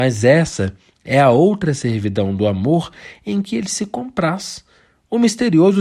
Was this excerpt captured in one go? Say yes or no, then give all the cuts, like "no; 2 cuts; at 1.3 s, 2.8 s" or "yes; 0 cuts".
yes; 0 cuts